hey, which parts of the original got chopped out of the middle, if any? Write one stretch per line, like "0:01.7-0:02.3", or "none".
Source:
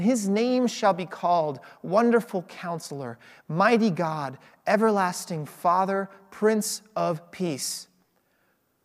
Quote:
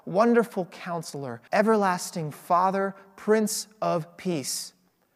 0:03.2-0:04.6